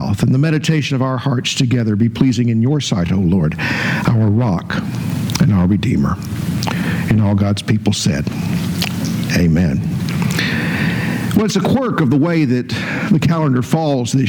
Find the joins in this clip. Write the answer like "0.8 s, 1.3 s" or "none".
none